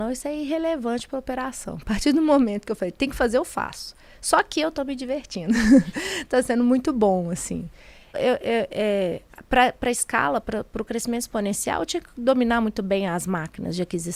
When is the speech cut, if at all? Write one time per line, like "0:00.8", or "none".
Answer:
0:08.1